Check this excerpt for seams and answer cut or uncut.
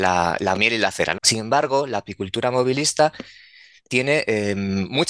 cut